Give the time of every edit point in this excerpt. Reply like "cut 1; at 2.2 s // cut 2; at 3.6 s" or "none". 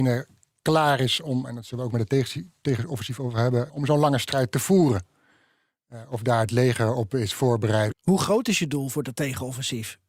cut 1; at 3.7 s // cut 2; at 7.9 s